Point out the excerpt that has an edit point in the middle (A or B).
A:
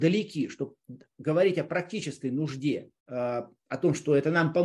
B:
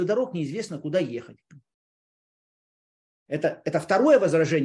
A